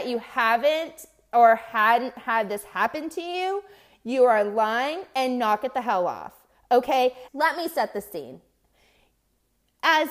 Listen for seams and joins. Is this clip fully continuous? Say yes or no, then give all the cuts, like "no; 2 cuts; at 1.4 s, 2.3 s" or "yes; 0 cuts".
no; 1 cut; at 7.3 s